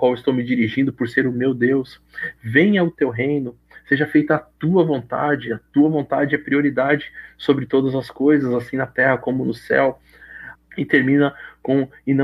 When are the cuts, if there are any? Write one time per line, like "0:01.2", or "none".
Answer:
0:10.6